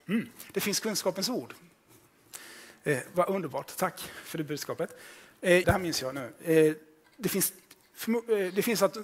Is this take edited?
yes; 1 cut; at 5.6 s

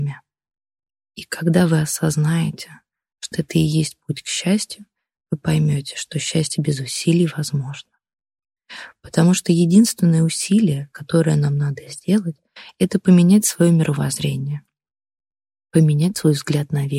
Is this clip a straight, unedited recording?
no; 1 cut; at 3.3 s

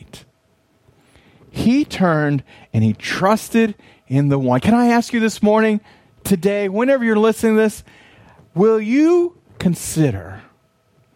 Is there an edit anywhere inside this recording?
no; 0 cuts

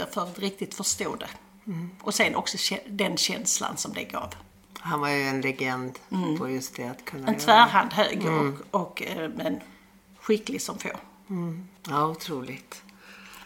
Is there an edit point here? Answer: yes; 1 cut; at 11.8 s

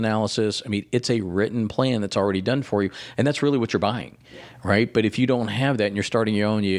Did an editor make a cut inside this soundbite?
no; 0 cuts

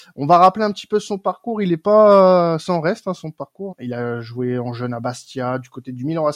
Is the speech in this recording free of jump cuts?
no; 1 cut; at 3.7 s

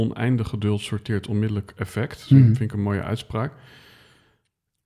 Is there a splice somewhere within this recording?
no; 0 cuts

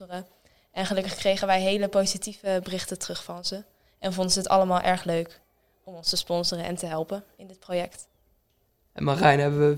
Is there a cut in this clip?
no; 0 cuts

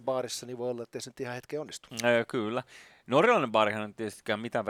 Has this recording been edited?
no; 0 cuts

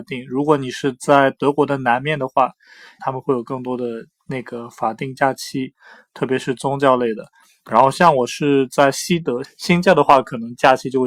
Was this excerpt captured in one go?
no; 2 cuts; at 3.0 s, 9.4 s

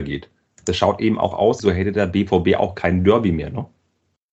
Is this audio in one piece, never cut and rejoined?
no; 1 cut; at 1.6 s

